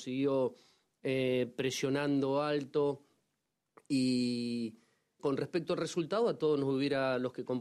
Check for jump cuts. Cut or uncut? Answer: cut